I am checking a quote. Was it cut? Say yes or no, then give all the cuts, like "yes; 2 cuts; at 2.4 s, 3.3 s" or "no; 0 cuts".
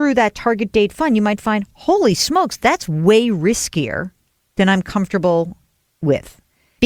no; 0 cuts